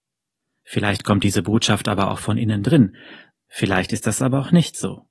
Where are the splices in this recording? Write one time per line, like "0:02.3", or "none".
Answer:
0:03.3

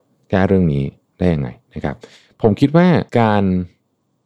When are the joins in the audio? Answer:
0:03.1

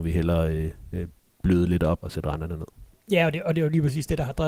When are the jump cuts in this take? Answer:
0:02.0

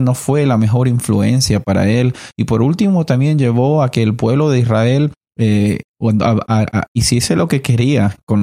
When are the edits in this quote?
none

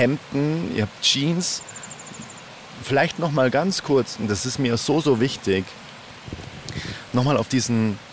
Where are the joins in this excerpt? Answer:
none

